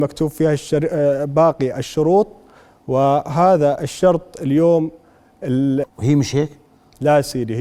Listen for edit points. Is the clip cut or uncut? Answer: cut